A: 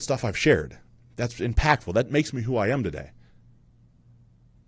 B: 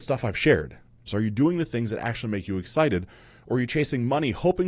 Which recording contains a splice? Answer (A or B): B